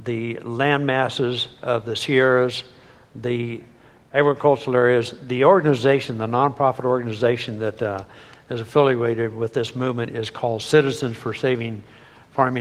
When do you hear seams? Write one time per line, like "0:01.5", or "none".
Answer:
none